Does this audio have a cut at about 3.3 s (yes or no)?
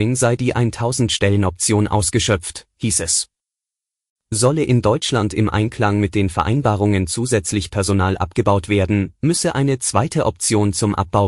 no